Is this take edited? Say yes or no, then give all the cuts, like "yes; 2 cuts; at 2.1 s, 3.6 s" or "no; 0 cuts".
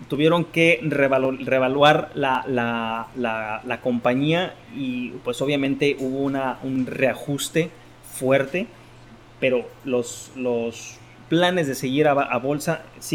no; 0 cuts